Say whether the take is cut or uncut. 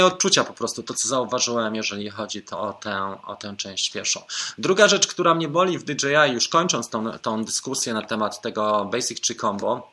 uncut